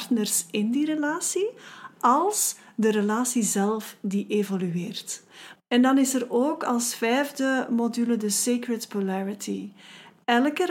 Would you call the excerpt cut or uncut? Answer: cut